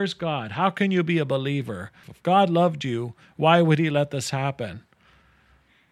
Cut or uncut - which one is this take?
cut